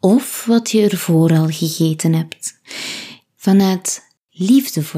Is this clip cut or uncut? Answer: cut